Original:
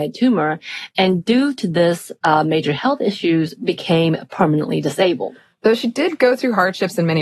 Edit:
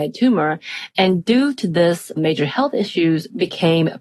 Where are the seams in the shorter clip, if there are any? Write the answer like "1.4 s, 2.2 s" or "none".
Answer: 2.2 s